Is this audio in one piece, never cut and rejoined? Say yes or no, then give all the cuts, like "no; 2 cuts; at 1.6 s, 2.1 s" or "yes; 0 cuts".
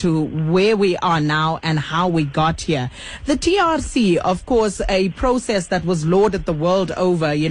yes; 0 cuts